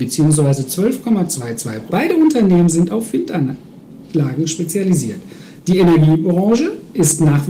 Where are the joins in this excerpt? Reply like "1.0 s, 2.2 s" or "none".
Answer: 1.9 s